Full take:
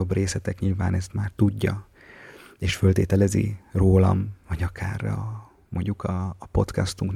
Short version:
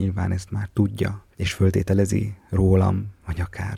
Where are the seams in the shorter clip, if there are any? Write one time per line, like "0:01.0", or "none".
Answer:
0:01.3